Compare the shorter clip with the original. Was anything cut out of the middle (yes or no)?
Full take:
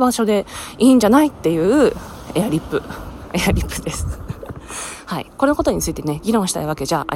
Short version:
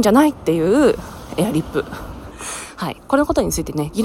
yes